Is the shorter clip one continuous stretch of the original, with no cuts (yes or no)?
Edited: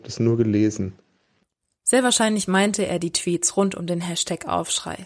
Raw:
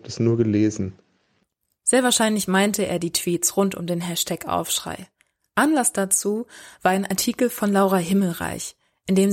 yes